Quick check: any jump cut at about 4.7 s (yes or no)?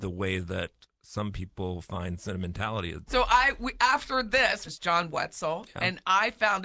yes